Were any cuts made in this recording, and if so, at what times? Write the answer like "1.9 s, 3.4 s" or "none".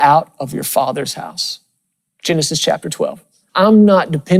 3.5 s